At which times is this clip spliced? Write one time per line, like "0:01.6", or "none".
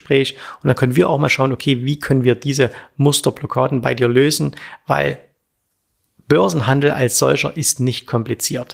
none